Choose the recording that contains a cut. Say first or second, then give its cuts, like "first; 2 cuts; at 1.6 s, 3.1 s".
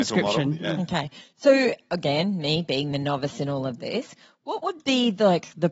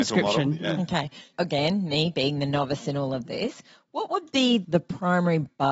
second; 2 cuts; at 1.3 s, 4.6 s